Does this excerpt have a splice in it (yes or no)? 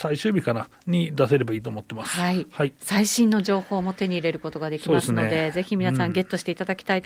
no